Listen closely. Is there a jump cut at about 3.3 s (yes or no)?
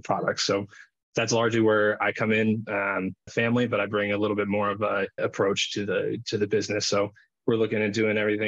yes